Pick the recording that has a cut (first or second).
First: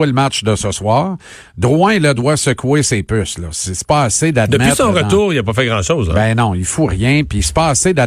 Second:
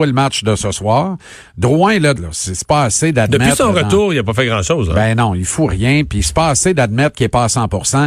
second